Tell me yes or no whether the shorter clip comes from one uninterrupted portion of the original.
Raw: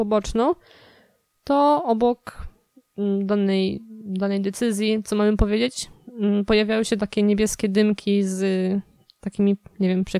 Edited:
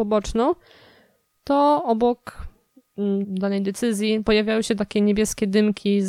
no